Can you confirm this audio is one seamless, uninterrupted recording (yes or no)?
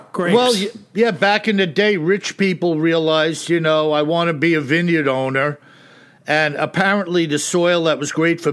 yes